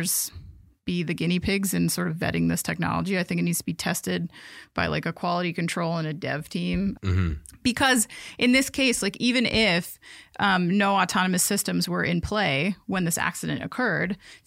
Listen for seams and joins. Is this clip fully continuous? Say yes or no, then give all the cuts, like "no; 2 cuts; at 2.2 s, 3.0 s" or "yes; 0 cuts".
no; 1 cut; at 7.0 s